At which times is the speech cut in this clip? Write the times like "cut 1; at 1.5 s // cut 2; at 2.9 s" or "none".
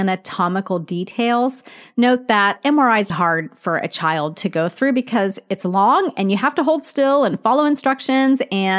cut 1; at 3.1 s

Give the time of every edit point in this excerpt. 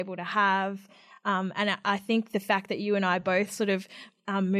none

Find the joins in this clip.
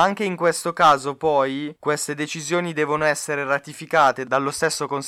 none

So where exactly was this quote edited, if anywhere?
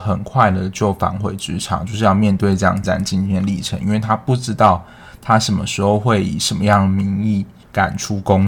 cut 1; at 2.8 s

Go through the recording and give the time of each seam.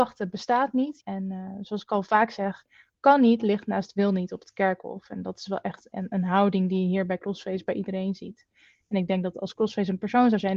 cut 1; at 1.0 s

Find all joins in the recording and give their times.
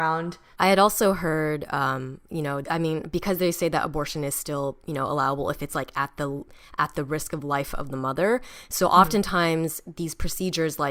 cut 1; at 2.6 s

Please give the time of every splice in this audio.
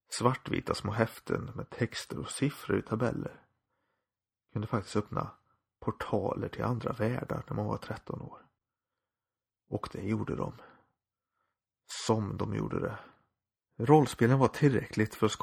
cut 1; at 13.6 s

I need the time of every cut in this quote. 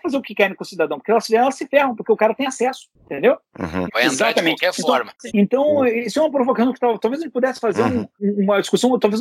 cut 1; at 3.9 s // cut 2; at 5.3 s

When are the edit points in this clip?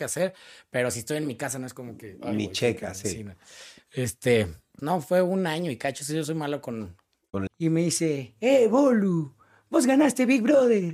cut 1; at 4.8 s // cut 2; at 7.5 s

